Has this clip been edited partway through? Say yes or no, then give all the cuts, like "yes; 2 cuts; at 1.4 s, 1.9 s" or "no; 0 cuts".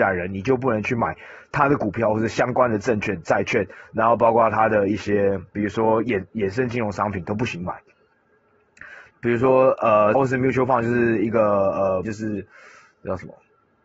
yes; 3 cuts; at 9.1 s, 10.1 s, 12.0 s